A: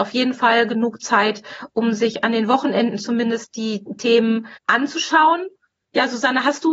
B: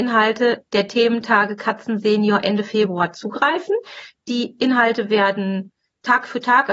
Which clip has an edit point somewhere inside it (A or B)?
A